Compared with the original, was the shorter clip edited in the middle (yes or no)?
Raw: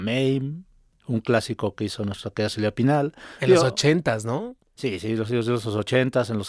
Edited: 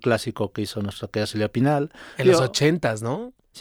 no